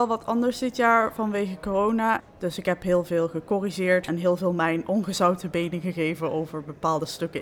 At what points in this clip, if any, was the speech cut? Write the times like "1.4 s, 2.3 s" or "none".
2.2 s, 4.1 s